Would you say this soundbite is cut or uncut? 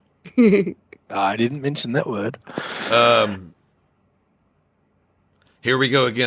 uncut